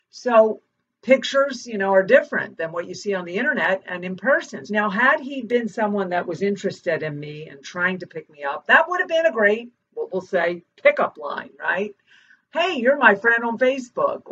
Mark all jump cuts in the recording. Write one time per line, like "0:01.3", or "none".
0:04.7